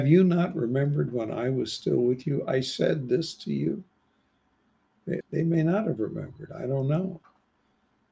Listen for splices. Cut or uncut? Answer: cut